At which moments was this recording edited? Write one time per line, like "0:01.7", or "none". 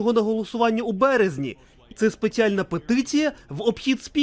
0:01.9